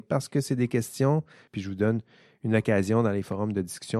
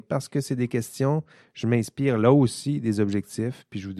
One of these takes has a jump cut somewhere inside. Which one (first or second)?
first